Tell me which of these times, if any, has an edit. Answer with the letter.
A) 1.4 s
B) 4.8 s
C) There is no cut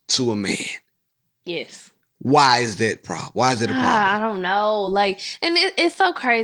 C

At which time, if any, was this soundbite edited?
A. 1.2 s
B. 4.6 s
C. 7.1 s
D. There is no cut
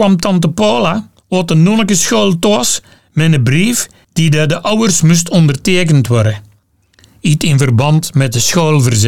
A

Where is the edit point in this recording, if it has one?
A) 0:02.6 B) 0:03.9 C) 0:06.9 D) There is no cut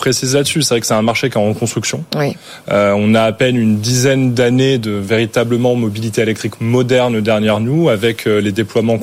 D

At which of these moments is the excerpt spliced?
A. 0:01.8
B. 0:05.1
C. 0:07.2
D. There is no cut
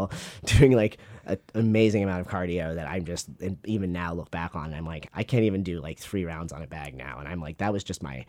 B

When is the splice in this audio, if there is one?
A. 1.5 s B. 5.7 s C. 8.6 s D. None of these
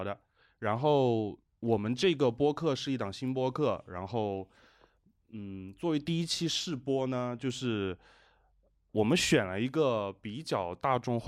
A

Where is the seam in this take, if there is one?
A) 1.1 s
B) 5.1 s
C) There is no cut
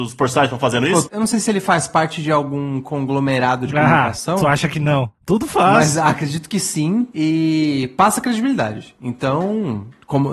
A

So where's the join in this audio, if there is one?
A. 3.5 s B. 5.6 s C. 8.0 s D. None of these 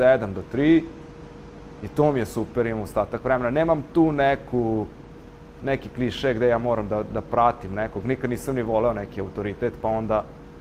D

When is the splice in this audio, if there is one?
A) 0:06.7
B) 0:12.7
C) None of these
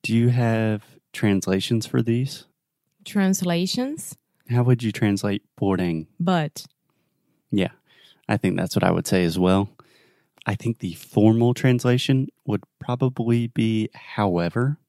C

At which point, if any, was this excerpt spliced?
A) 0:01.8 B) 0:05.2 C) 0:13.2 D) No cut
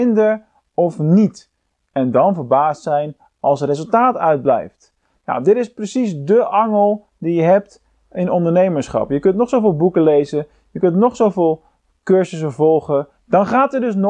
C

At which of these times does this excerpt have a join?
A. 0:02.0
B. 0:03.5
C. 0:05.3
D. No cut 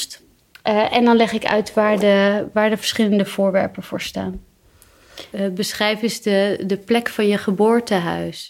C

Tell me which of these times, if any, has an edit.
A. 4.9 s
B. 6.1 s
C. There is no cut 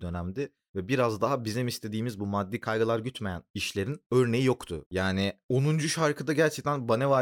A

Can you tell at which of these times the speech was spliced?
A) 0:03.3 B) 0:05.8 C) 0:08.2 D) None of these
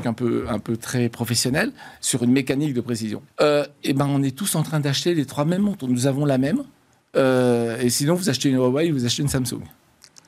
A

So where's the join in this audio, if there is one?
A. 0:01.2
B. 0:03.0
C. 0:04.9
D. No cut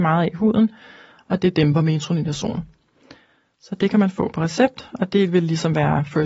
D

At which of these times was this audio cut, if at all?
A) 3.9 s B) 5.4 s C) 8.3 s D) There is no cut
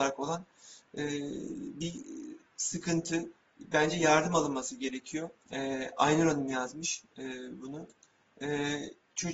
B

